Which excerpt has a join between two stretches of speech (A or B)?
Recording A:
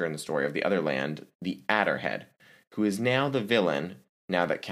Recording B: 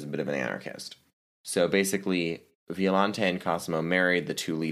B